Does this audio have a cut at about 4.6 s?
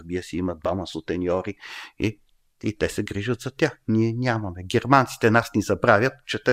no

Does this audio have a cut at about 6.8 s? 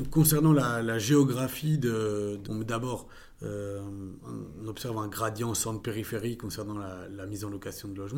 no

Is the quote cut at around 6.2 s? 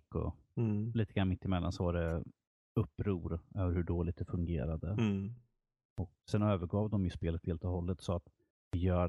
yes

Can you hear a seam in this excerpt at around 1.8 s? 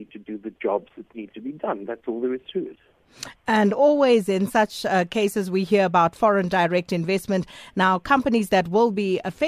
no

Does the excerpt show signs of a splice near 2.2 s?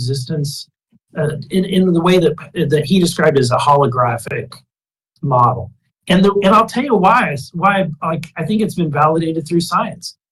no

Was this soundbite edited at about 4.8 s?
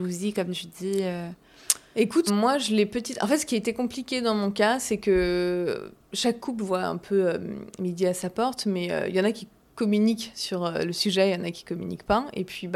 no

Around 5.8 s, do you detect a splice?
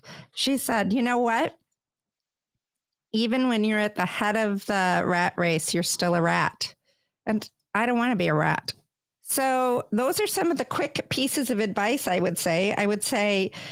no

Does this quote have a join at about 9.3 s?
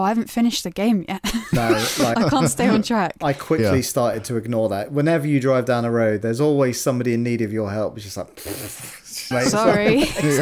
yes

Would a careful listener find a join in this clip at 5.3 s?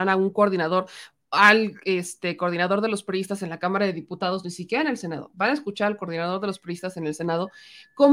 no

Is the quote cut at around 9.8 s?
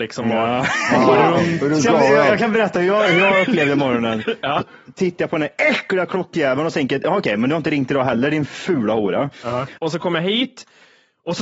yes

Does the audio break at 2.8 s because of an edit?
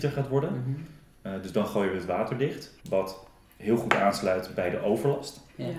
yes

